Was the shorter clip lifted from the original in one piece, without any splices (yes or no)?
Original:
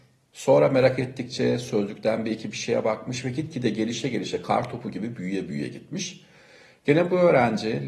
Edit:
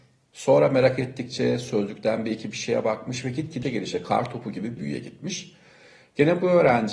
no